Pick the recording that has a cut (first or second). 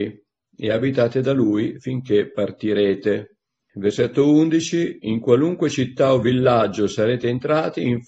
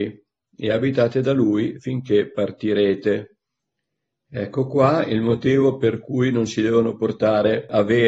first